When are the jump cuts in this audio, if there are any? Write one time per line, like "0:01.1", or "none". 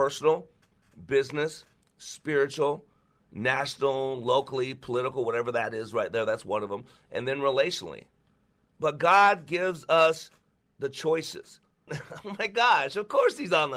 0:08.7
0:11.9

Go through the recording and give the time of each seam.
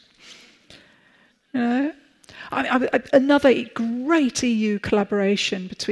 0:03.1

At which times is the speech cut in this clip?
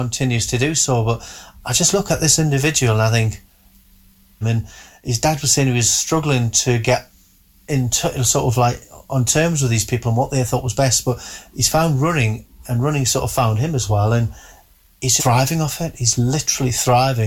0:04.4
0:15.2

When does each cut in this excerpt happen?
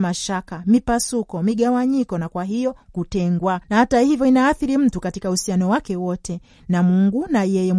none

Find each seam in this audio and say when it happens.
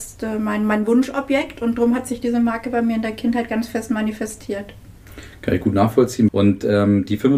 0:06.3

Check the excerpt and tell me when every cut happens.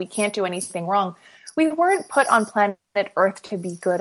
none

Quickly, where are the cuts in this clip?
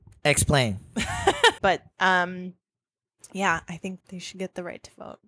0:01.6
0:04.0

